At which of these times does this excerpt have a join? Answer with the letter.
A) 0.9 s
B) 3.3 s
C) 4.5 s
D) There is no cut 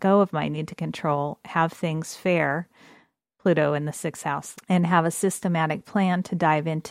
C